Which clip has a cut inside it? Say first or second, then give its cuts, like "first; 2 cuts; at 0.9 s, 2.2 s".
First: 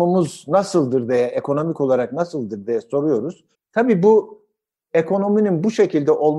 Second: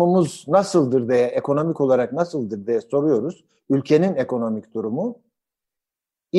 first; 1 cut; at 3.5 s